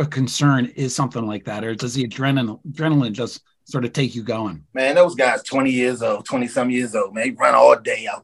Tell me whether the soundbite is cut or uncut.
cut